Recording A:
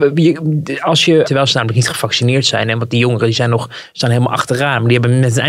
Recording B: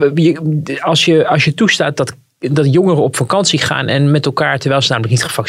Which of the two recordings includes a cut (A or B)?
A